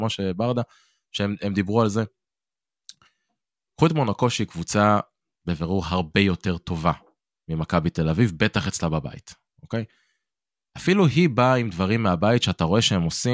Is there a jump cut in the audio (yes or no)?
no